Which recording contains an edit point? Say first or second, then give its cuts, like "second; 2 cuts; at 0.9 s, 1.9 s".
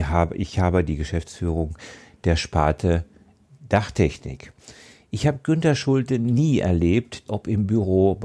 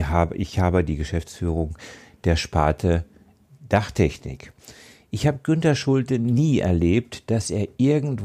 first; 1 cut; at 7.3 s